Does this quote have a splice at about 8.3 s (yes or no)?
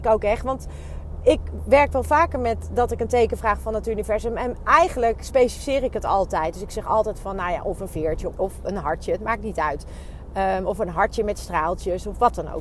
yes